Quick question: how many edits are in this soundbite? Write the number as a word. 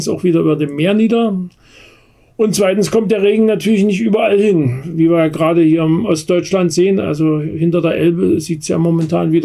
zero